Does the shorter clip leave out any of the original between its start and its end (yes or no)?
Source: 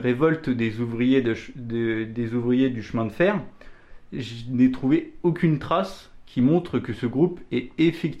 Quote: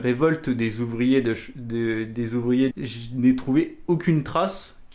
yes